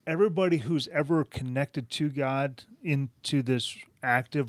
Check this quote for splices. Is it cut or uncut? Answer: uncut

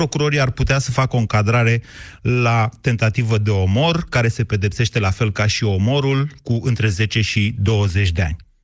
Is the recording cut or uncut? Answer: uncut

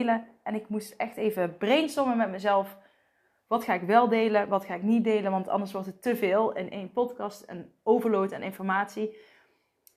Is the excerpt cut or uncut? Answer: uncut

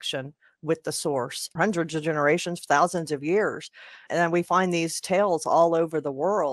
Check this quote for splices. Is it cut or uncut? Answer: cut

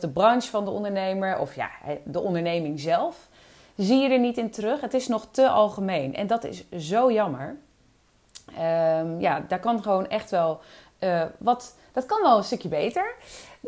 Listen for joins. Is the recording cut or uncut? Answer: uncut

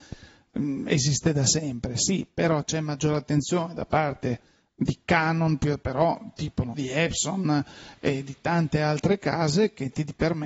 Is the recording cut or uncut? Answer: cut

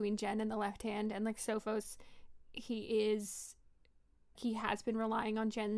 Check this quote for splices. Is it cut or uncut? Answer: cut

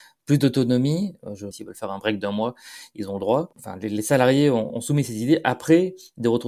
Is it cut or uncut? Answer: cut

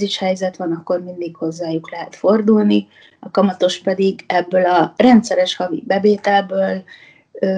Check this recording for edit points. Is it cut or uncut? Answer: uncut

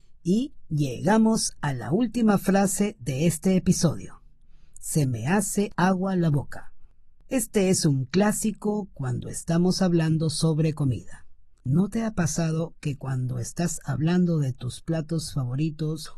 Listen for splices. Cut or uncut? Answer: cut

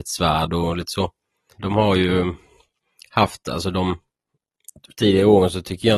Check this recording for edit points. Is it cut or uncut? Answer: cut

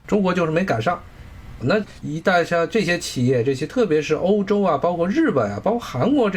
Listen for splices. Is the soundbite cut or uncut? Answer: cut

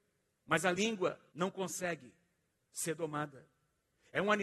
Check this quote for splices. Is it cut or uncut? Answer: cut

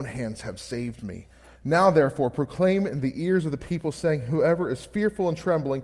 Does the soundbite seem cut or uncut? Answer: uncut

